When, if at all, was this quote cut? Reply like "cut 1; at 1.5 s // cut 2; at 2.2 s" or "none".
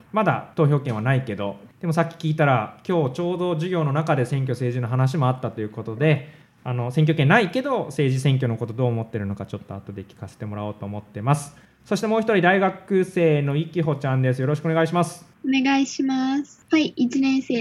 cut 1; at 16.7 s